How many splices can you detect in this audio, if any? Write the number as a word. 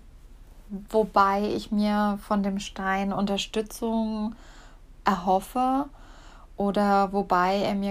zero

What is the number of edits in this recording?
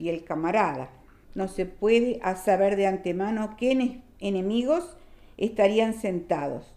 one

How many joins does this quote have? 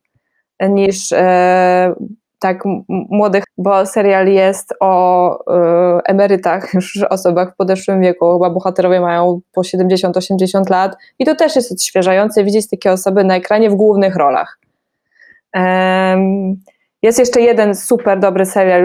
one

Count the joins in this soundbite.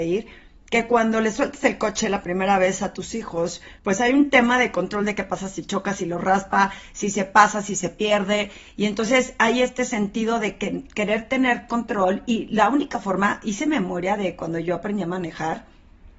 one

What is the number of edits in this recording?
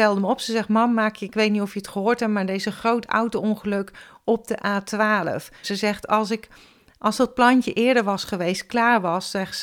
one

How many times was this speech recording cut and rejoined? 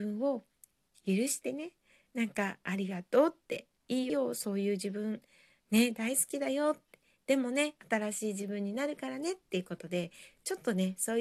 one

